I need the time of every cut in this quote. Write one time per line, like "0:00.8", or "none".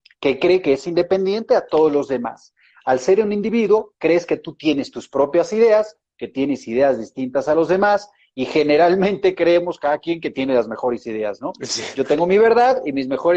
none